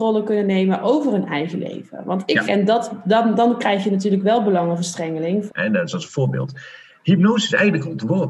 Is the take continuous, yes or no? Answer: no